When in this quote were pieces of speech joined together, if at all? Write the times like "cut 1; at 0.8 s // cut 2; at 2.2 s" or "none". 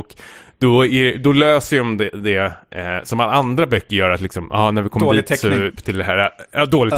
none